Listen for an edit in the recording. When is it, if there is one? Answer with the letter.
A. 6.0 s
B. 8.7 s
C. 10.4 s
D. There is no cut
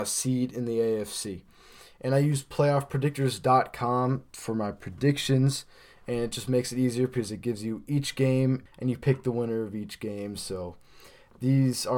B